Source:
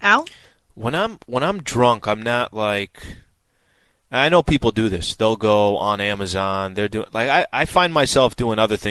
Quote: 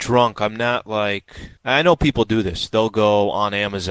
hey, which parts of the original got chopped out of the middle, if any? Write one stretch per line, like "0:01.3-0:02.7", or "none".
0:03.2-0:04.0